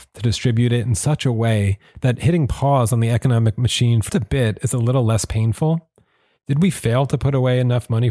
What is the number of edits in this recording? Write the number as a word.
one